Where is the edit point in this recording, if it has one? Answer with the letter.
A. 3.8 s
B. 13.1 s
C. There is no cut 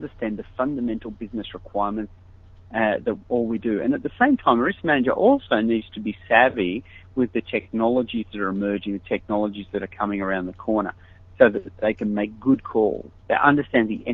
B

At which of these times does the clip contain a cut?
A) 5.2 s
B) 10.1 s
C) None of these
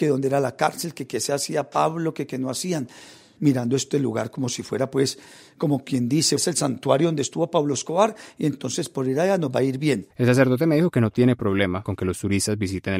B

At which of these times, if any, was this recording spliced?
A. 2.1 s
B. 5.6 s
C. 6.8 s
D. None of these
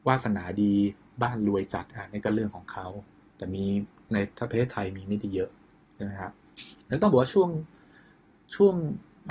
C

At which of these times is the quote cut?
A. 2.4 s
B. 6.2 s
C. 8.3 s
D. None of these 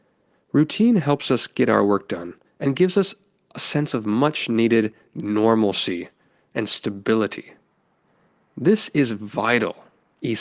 A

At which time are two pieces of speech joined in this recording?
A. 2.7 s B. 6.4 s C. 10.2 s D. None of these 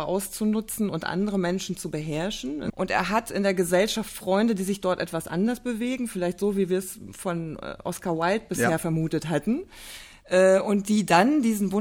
A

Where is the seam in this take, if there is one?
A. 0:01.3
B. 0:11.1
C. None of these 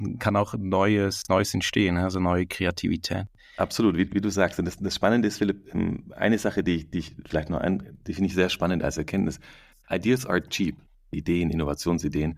B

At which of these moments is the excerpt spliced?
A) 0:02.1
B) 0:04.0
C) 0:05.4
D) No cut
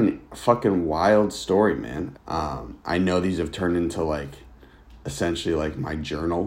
A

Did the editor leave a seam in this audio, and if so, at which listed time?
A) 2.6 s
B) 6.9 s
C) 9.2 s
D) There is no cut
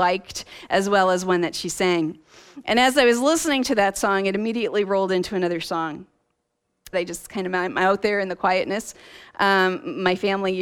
B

